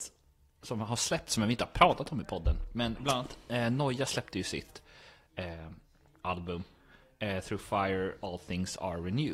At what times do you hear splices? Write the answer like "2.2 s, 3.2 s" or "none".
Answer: none